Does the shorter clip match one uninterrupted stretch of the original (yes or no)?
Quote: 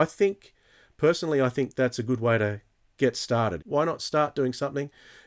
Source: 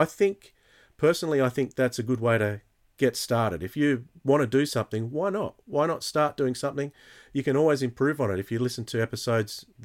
no